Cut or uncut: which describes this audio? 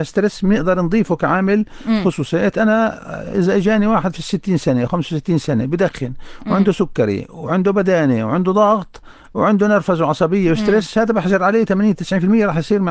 uncut